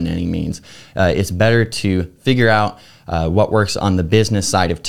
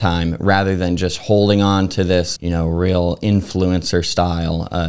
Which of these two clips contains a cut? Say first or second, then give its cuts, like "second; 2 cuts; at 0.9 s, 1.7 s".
second; 1 cut; at 2.4 s